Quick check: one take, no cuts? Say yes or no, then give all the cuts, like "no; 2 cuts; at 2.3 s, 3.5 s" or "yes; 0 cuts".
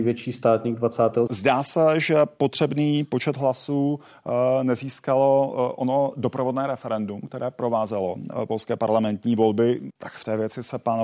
no; 2 cuts; at 1.3 s, 9.9 s